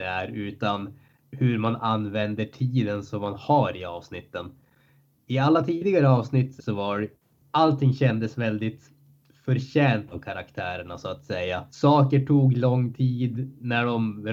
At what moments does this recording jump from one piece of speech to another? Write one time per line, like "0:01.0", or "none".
0:06.6
0:11.7